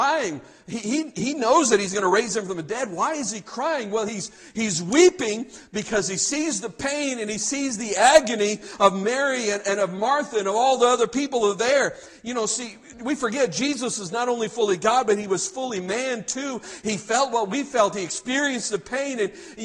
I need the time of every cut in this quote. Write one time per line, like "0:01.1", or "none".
none